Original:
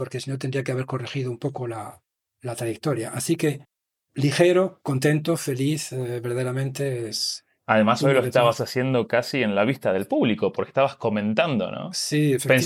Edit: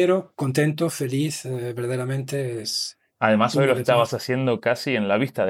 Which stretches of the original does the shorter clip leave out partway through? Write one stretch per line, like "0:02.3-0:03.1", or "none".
none

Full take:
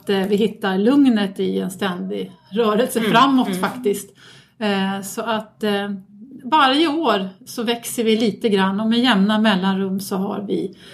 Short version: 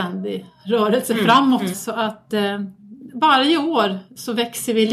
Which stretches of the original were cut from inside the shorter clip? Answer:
0:03.6-0:05.0

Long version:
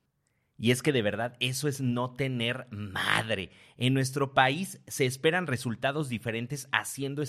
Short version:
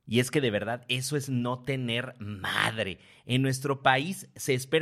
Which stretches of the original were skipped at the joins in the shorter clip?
none

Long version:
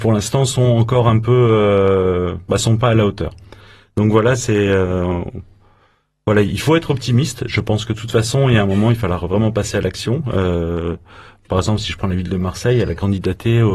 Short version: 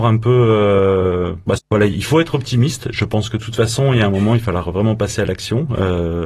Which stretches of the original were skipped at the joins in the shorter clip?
0:02.6-0:06.1

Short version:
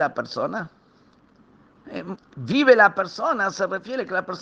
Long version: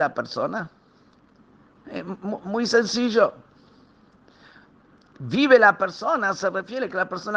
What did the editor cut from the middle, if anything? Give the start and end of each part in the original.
0:02.2-0:05.0

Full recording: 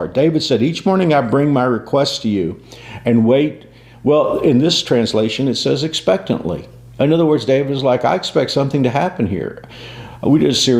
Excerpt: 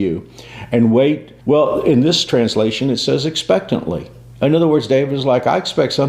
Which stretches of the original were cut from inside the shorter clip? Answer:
0:03.7-0:04.0

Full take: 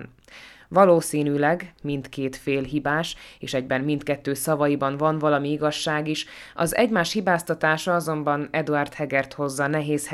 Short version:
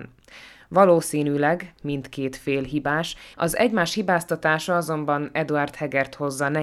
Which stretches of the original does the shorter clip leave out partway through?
0:03.3-0:06.5

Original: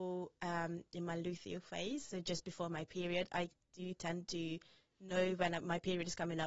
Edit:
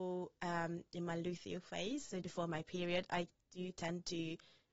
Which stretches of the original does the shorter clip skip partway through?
0:02.2-0:02.4

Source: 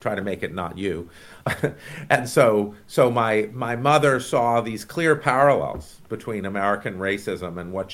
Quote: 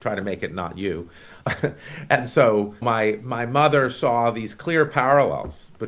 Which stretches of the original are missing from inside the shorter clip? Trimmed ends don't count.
0:02.8-0:03.1

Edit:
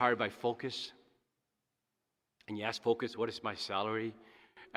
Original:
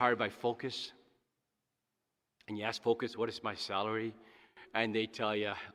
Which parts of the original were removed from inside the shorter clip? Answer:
none

